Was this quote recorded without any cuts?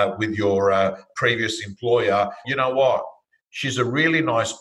no; 2 cuts; at 1.1 s, 2.4 s

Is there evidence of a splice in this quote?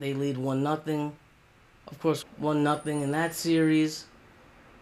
yes; 1 cut; at 2.2 s

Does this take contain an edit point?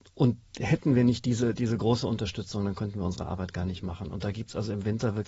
no; 0 cuts

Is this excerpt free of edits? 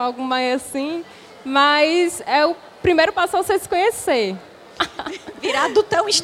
no; 1 cut; at 4.8 s

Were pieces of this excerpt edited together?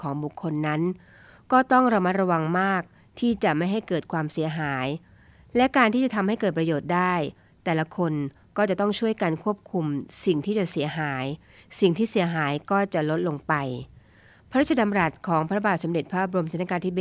no; 0 cuts

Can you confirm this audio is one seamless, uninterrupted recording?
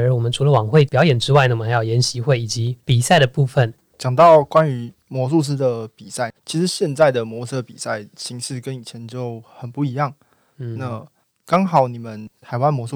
no; 1 cut; at 3.8 s

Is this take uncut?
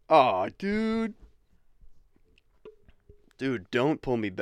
yes; 0 cuts

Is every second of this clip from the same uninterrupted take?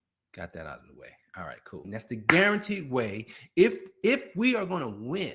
no; 1 cut; at 1.8 s

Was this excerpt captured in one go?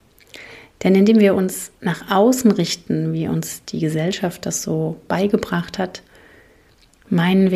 yes; 0 cuts

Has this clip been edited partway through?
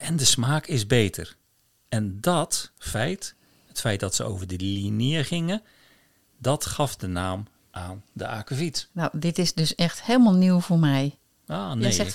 no; 0 cuts

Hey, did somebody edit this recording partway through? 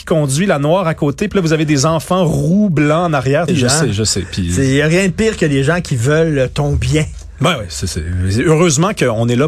yes; 1 cut; at 3.5 s

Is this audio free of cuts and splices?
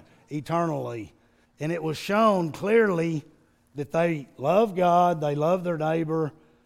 no; 1 cut; at 1.4 s

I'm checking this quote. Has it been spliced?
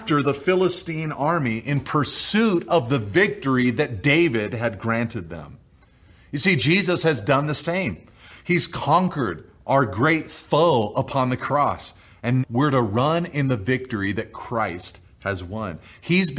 yes; 1 cut; at 12.4 s

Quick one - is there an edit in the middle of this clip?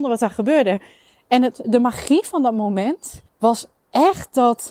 yes; 2 cuts; at 1.6 s, 3.3 s

